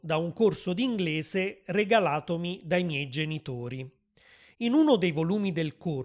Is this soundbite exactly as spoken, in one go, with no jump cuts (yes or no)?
yes